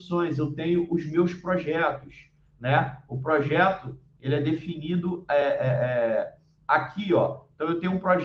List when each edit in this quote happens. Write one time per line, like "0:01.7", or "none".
none